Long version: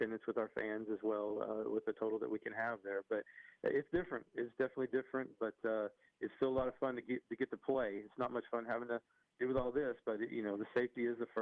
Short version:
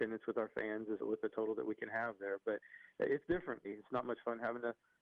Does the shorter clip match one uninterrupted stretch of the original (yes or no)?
no